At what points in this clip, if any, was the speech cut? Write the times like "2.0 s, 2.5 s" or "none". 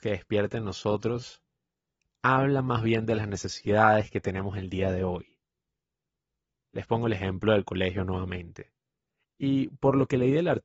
9.2 s